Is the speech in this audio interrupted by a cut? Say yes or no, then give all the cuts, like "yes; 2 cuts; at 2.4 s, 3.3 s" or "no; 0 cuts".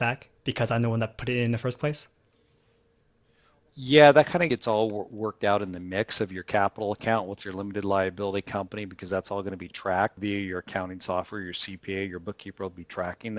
no; 0 cuts